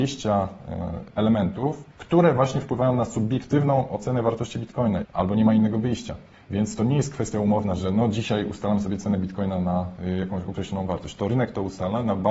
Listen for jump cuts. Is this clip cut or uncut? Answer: cut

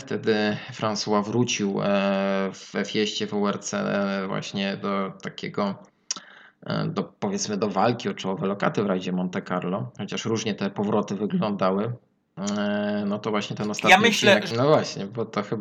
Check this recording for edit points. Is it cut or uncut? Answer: cut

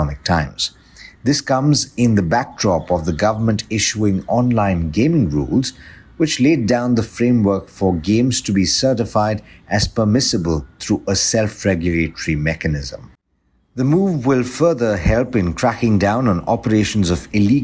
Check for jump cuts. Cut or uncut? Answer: uncut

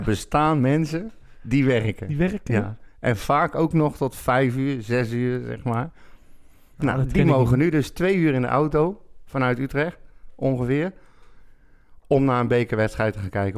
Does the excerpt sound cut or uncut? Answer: uncut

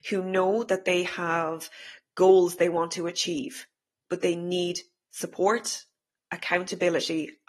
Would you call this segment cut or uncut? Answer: uncut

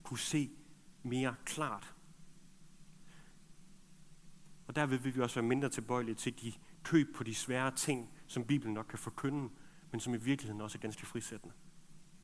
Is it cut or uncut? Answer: uncut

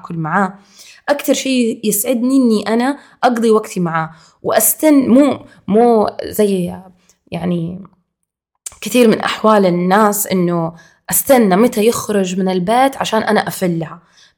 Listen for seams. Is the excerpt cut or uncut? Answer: uncut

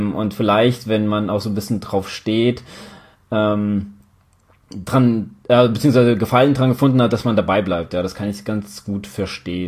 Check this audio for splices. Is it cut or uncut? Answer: uncut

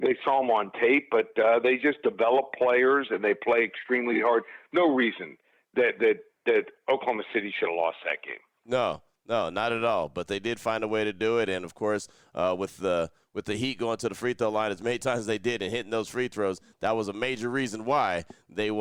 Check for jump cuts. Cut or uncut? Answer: uncut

